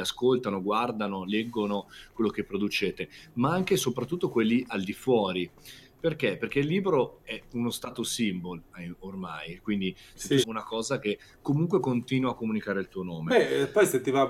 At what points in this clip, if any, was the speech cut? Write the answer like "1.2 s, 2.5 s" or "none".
10.4 s